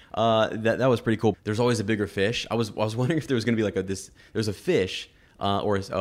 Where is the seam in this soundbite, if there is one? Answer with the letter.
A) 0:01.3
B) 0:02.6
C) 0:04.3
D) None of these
A